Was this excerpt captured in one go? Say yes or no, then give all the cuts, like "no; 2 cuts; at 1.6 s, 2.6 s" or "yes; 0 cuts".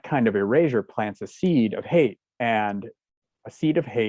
yes; 0 cuts